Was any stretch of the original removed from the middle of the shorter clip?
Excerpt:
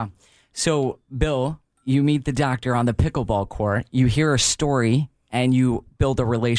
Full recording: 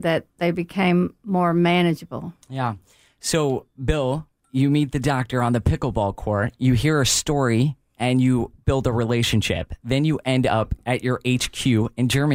no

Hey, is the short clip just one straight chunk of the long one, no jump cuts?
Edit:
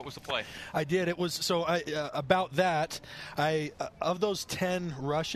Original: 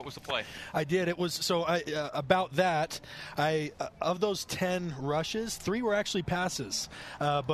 yes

